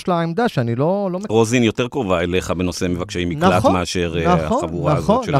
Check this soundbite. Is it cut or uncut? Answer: cut